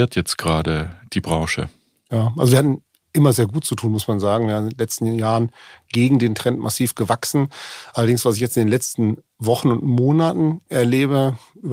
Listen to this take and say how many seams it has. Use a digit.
0